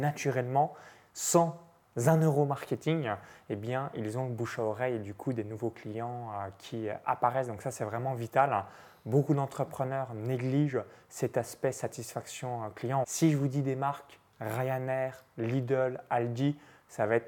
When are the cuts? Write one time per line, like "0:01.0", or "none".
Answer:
0:13.0